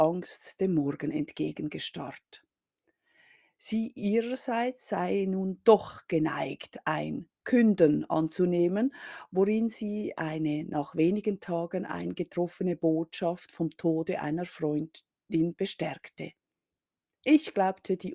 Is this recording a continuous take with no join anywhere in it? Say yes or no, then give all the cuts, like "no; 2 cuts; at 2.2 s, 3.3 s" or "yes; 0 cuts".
yes; 0 cuts